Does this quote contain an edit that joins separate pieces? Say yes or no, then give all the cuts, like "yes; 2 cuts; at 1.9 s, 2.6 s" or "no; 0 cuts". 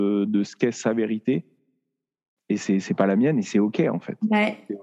no; 0 cuts